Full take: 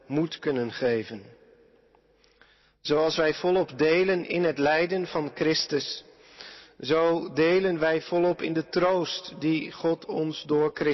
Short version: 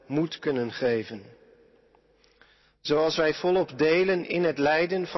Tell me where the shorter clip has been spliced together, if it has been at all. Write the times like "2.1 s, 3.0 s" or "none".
none